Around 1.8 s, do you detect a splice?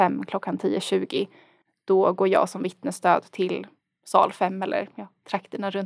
no; 0 cuts

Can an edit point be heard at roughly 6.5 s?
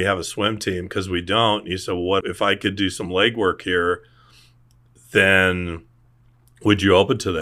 no; 1 cut; at 2.2 s

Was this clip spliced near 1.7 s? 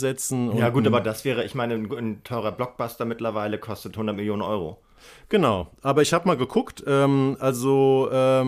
no; 0 cuts

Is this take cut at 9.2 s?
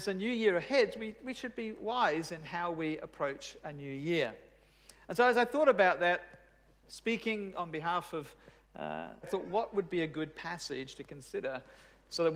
yes; 1 cut; at 9.2 s

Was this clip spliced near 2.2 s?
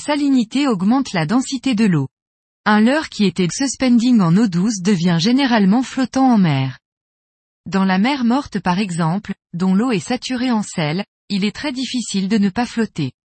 no; 2 cuts; at 3.5 s, 7.6 s

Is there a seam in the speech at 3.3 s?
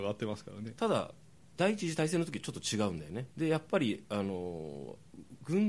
yes; 2 cuts; at 1.6 s, 3.3 s

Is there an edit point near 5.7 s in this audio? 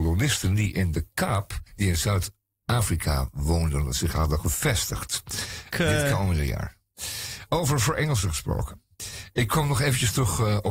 yes; 2 cuts; at 1.7 s, 5.7 s

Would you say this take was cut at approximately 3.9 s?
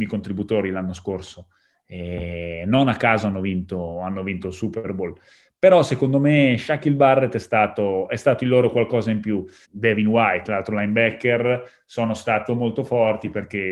no; 2 cuts; at 9.6 s, 12.5 s

